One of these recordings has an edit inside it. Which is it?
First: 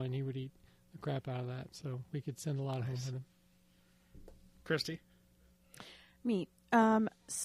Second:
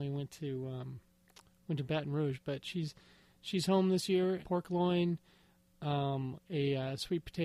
second; 2 cuts; at 4.4 s, 6.4 s

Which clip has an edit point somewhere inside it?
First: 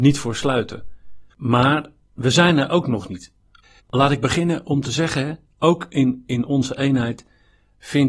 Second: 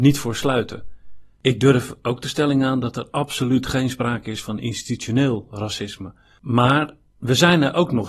first; 2 cuts; at 1.3 s, 3.8 s

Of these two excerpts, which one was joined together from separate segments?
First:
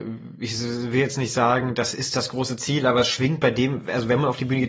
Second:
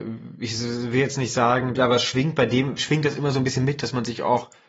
second; 2 cuts; at 1.8 s, 2.8 s

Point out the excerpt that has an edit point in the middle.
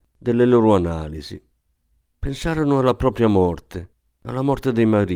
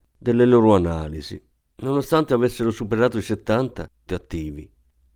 second; 2 cuts; at 1.7 s, 4.1 s

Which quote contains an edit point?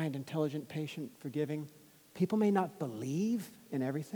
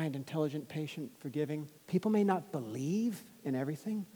second; 1 cut; at 1.8 s

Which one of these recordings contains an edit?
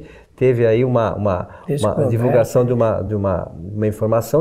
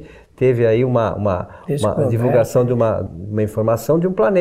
second; 1 cut; at 3.1 s

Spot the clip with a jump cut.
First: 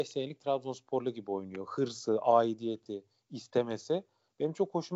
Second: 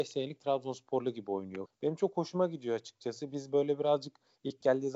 second; 1 cut; at 1.7 s

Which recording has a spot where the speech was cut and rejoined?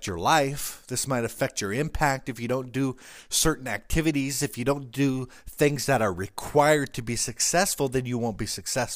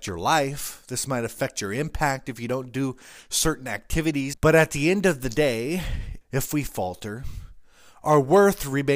second; 2 cuts; at 4.3 s, 6.2 s

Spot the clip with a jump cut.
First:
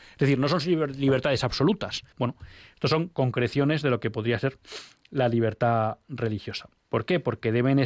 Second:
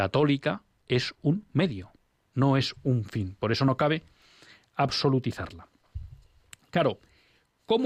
first; 2 cuts; at 2.1 s, 6.8 s

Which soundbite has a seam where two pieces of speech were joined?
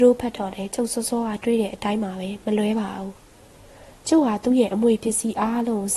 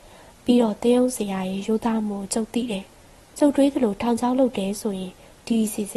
second; 1 cut; at 2.9 s

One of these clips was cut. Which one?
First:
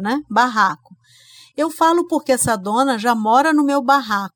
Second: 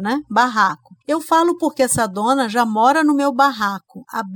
second; 1 cut; at 1.0 s

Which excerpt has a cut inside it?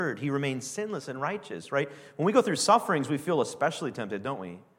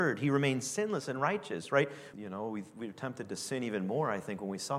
second; 1 cut; at 2.1 s

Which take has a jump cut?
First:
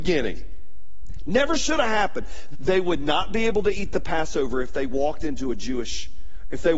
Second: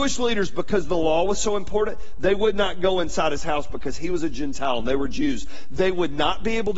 first; 1 cut; at 2.5 s

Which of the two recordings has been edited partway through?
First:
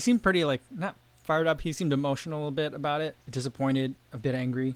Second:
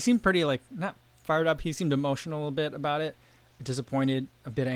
first; 1 cut; at 3.2 s

